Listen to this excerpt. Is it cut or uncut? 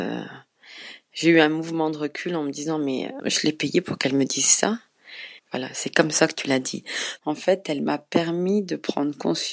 cut